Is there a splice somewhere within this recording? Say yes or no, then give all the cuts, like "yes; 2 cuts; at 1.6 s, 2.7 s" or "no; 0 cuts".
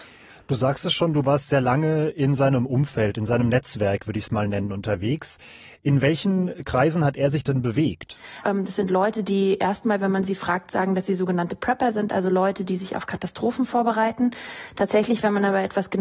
yes; 1 cut; at 8.4 s